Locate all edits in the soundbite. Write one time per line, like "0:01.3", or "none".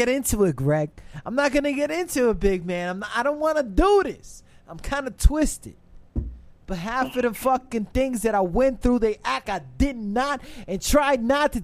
0:09.4

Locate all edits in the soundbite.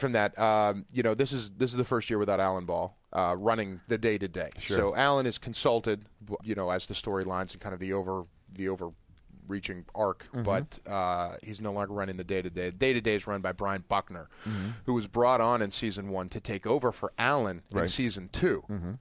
0:06.4

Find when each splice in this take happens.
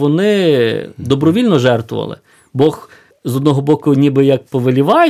none

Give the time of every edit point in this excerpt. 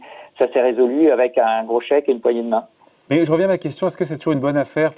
0:03.1

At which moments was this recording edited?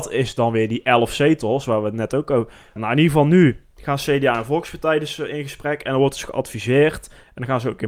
0:02.8

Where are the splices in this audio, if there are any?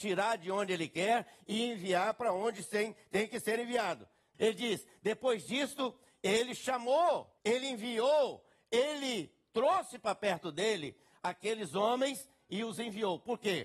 0:04.3
0:07.4

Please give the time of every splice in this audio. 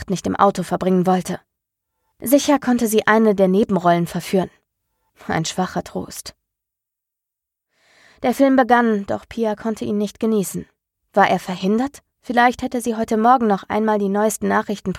0:10.9
0:12.1

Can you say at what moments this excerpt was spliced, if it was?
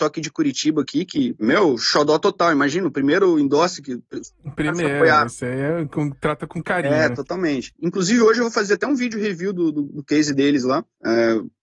0:07.7

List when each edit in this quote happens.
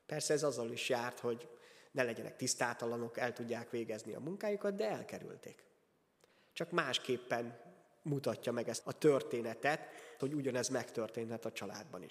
0:08.8
0:10.2

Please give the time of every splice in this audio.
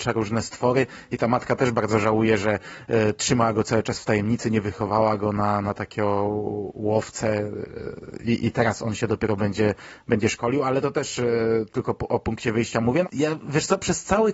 0:13.0

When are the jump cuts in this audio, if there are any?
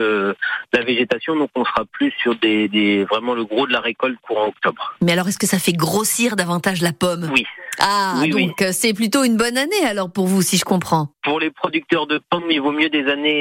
0:11.1

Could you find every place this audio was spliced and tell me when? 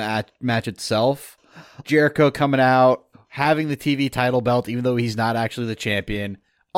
0:01.8
0:03.1

